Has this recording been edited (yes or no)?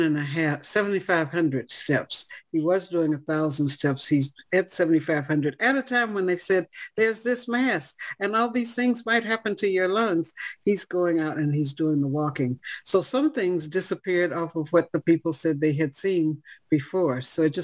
yes